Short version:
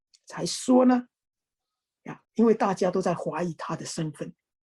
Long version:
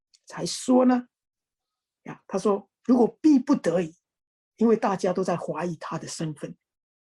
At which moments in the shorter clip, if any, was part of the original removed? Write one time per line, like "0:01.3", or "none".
0:02.2